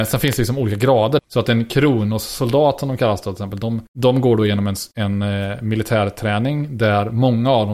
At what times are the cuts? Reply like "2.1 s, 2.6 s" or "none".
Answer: 1.2 s, 3.9 s